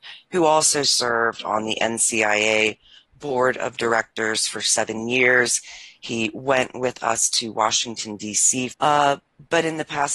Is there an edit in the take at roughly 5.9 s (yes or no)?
no